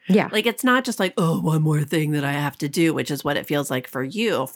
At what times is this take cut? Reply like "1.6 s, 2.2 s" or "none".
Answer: none